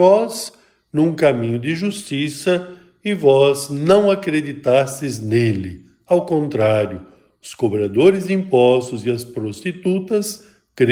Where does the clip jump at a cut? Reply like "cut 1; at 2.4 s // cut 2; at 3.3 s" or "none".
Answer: none